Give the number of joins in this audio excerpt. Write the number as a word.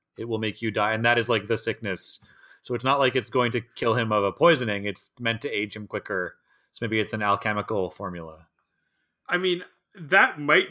zero